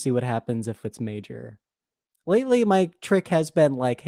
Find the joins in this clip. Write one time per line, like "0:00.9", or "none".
none